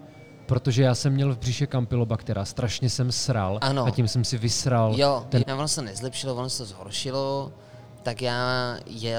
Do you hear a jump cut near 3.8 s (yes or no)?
no